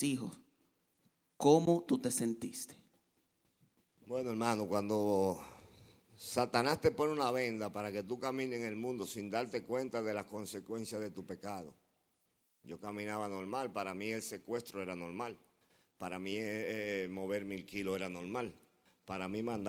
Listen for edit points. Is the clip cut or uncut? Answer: uncut